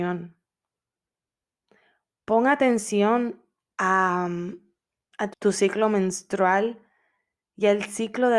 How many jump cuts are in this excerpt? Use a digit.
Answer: 1